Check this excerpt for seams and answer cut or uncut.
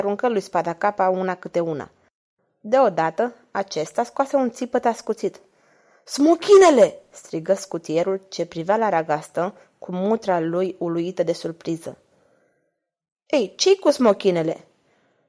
uncut